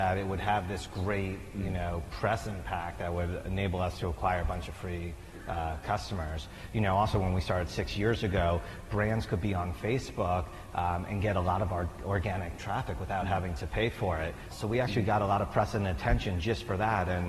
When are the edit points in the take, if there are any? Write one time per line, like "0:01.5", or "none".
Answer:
0:14.5